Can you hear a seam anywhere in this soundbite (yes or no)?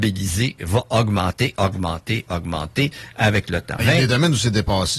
yes